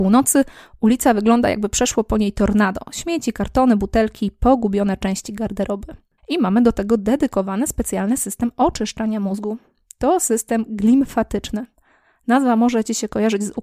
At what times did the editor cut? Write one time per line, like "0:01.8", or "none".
0:06.2